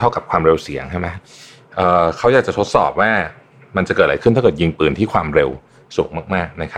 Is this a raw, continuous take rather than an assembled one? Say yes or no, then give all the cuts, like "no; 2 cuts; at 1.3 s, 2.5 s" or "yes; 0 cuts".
yes; 0 cuts